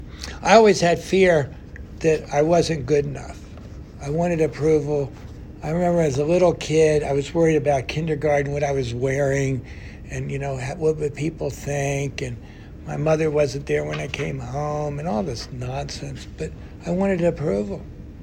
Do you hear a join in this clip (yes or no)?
no